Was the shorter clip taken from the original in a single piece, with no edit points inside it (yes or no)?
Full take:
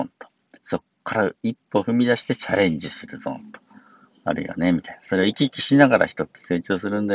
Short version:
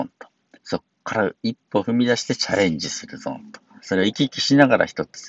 no